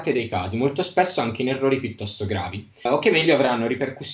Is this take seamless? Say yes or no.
no